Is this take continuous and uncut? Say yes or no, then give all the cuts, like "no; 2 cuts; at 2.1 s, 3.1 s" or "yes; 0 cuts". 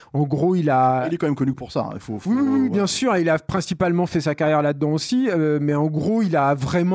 yes; 0 cuts